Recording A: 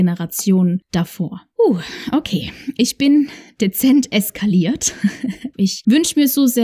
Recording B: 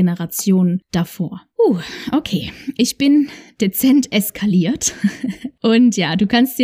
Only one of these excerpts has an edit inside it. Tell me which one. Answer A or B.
A